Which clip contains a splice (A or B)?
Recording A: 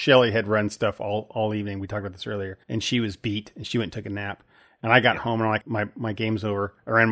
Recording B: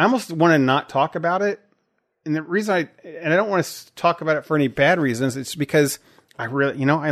A